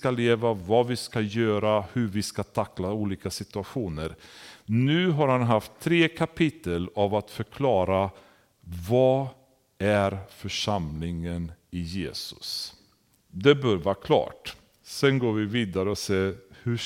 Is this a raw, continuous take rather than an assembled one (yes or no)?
no